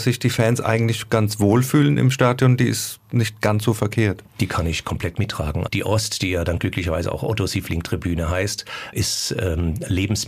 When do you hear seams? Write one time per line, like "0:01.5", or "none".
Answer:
0:05.7
0:08.9